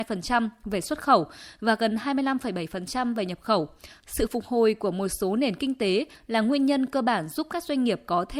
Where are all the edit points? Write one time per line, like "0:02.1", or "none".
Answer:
0:04.0